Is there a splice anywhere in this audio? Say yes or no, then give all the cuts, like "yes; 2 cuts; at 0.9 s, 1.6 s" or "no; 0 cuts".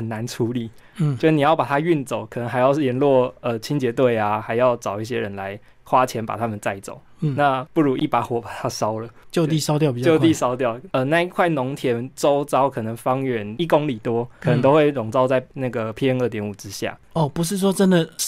yes; 2 cuts; at 10.9 s, 17.0 s